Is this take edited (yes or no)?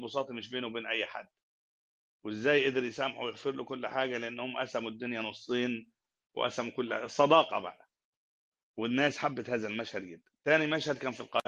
no